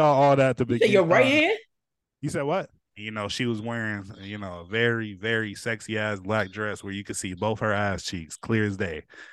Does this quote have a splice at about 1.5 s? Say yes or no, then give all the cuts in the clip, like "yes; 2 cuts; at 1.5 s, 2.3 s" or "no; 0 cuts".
no; 1 cut; at 2.9 s